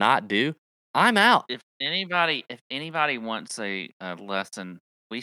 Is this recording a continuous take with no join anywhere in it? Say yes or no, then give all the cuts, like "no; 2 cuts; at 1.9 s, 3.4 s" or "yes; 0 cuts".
yes; 0 cuts